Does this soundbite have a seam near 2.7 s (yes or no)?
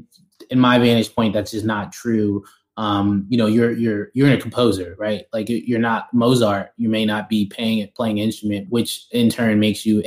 no